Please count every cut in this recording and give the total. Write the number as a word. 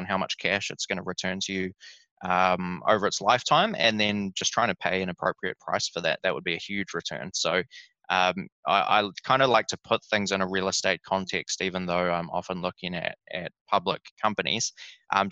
two